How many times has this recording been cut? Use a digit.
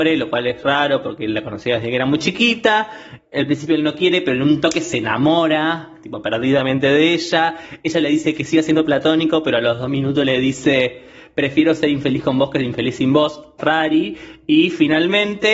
0